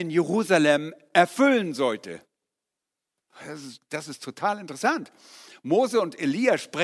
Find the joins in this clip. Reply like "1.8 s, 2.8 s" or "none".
none